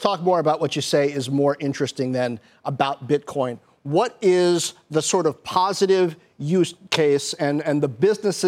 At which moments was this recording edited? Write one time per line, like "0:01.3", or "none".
none